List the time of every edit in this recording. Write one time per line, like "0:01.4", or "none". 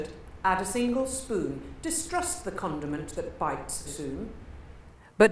0:03.9